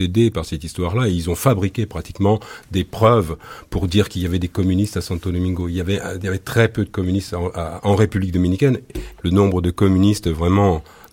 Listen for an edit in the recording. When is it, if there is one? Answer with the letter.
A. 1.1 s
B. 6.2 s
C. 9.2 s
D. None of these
C